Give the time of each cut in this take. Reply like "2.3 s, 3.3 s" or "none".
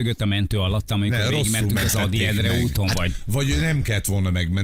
none